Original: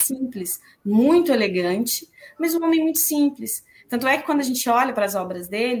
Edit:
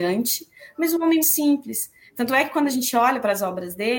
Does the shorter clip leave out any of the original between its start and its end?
yes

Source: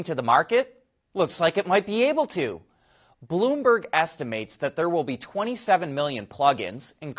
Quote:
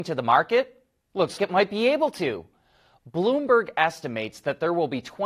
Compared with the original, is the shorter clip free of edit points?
no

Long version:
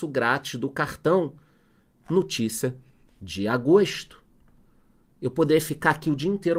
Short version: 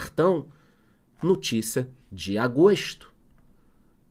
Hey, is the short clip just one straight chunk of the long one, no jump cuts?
no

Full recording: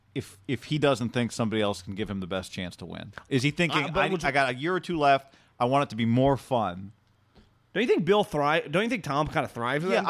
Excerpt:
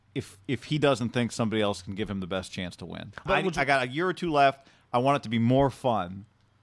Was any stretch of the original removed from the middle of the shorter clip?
yes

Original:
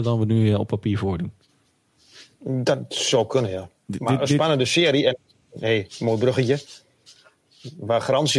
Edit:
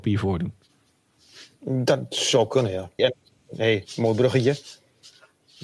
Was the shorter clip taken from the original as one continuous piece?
no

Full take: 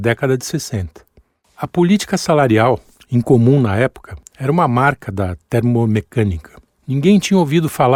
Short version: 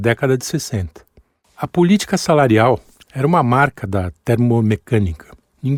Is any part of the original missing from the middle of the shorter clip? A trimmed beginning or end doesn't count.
yes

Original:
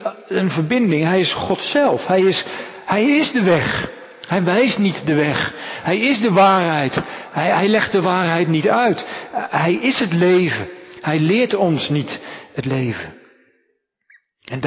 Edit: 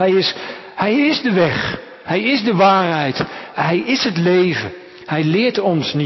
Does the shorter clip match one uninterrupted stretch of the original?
no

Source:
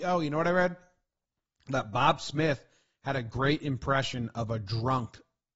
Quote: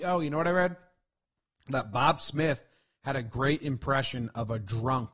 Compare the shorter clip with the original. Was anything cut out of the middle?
no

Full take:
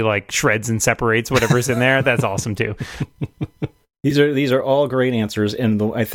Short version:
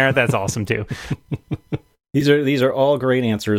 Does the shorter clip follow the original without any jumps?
yes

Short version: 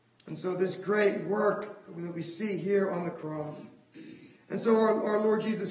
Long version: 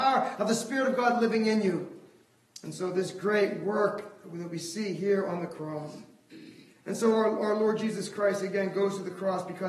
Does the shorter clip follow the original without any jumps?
yes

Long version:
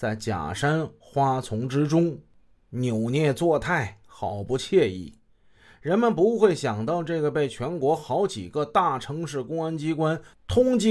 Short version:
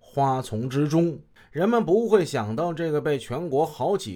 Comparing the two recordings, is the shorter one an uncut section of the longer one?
no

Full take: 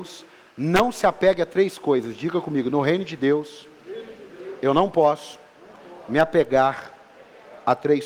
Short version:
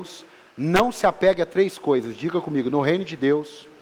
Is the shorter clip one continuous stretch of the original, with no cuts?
yes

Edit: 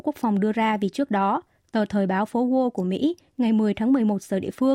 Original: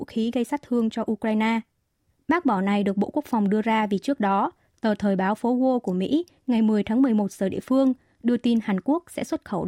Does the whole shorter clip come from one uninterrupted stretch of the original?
yes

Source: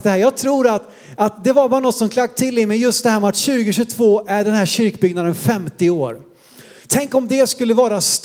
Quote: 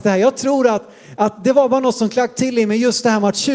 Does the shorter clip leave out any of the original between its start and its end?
no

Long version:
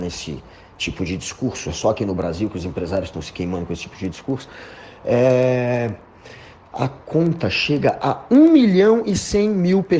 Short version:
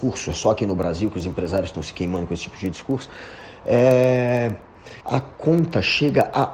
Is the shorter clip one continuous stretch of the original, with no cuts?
no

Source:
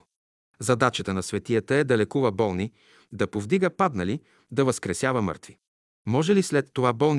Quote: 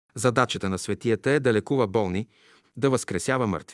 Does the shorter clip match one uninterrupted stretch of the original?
no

